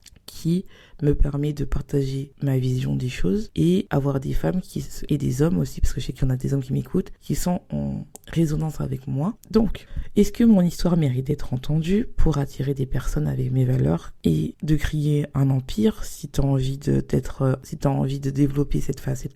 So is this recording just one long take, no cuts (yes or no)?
no